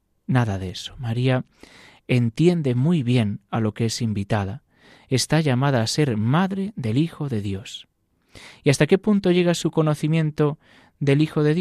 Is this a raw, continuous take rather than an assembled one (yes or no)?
yes